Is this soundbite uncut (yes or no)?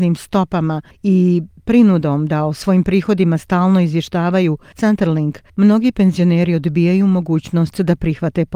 yes